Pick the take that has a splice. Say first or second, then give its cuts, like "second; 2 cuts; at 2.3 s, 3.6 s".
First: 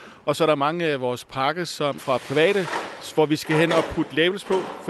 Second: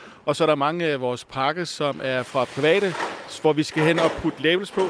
first; 1 cut; at 2.0 s